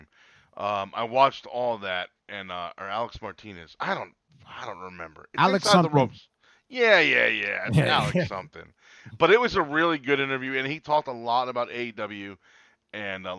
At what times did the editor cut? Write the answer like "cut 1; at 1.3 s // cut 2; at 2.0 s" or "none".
none